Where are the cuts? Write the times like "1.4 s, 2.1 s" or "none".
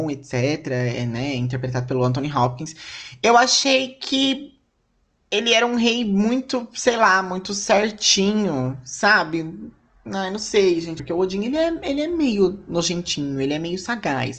11.0 s